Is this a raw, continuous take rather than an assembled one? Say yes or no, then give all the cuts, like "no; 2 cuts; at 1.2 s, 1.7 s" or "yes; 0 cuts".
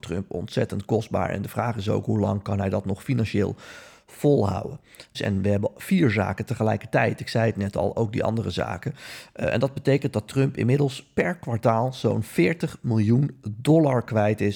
no; 1 cut; at 5.1 s